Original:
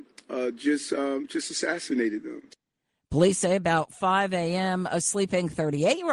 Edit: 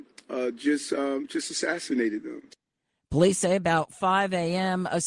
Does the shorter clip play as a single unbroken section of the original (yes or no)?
yes